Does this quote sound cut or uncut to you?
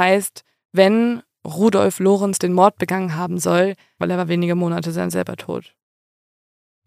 cut